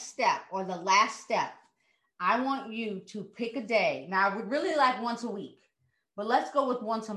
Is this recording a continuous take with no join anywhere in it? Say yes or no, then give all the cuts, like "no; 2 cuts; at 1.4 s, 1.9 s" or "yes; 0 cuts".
yes; 0 cuts